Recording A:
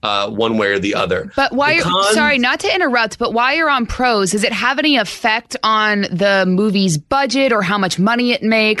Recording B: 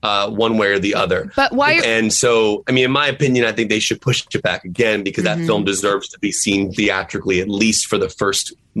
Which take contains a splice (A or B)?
B